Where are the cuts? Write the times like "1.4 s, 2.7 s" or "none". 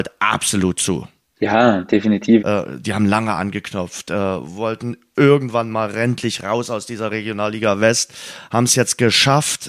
2.4 s

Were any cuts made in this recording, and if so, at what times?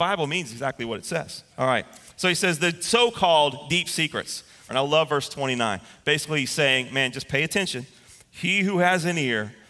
1.5 s, 4.7 s

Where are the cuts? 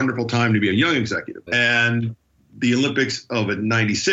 1.5 s

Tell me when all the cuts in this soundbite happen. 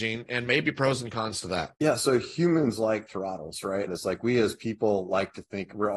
1.7 s, 3.9 s

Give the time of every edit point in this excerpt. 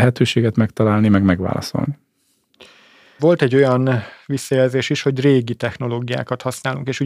3.2 s

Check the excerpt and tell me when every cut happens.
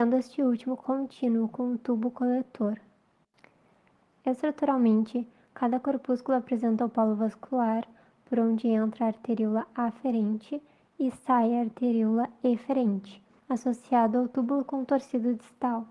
13.4 s

